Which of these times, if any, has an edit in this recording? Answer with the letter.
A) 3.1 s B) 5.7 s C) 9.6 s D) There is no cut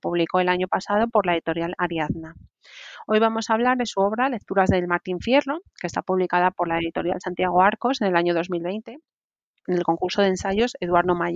C